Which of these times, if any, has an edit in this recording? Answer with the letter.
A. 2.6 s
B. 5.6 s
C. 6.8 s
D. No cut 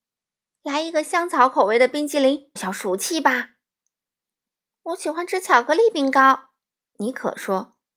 A